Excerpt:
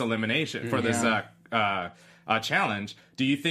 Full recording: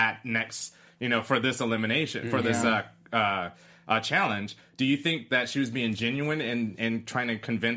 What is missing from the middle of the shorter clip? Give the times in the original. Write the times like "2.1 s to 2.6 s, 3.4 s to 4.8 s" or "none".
none